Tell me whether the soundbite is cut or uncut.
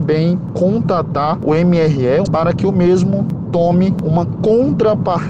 cut